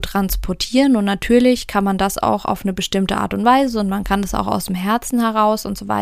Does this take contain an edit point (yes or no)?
no